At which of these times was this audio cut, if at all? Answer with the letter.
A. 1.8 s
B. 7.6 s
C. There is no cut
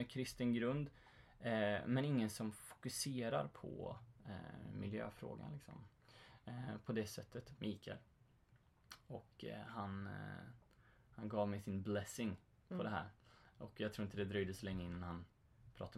B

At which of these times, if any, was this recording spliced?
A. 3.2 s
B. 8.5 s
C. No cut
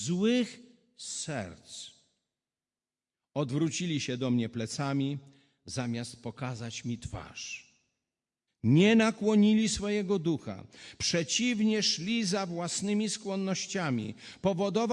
B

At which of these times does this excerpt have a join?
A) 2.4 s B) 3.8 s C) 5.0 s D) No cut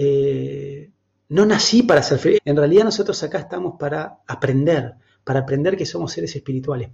A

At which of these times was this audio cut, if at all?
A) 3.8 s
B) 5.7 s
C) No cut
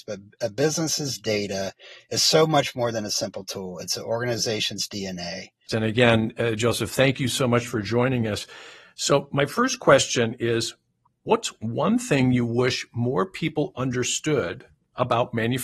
B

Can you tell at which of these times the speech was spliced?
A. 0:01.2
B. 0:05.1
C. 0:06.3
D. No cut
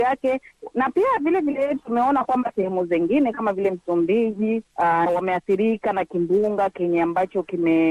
B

